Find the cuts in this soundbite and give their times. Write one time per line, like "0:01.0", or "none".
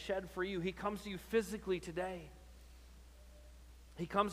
none